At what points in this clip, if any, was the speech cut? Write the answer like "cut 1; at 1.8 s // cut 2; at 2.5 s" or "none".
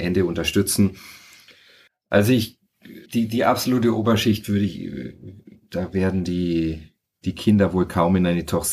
cut 1; at 1.9 s // cut 2; at 3.1 s